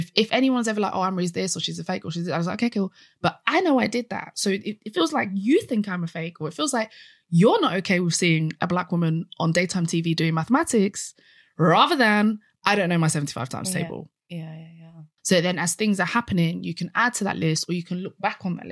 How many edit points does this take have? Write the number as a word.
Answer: one